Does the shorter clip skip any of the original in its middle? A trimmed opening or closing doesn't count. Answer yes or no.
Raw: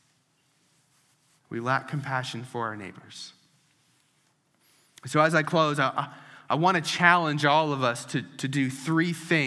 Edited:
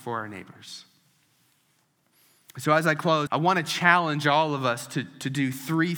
yes